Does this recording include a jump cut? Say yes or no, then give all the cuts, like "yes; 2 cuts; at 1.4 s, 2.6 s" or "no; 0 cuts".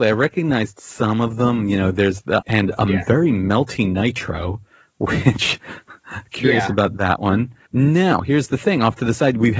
yes; 1 cut; at 2.4 s